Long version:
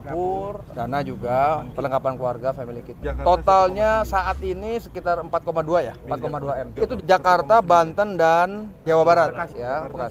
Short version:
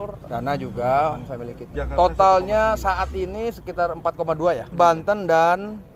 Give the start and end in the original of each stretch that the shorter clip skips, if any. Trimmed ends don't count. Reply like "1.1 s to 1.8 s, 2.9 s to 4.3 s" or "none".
1.7 s to 2.5 s, 6.0 s to 7.6 s